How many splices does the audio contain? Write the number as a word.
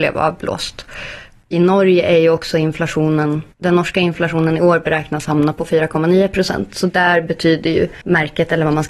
zero